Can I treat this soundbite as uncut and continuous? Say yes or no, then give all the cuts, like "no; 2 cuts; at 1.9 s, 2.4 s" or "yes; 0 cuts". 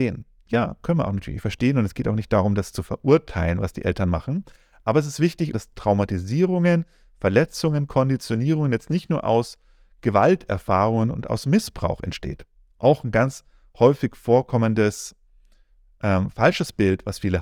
no; 1 cut; at 5.5 s